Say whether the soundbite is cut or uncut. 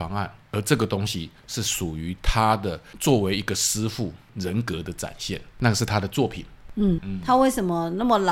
cut